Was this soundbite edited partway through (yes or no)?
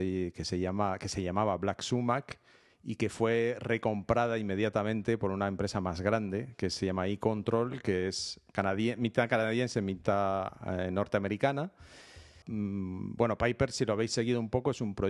yes